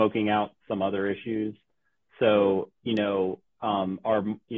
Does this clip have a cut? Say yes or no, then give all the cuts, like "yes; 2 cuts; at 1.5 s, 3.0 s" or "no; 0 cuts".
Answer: no; 0 cuts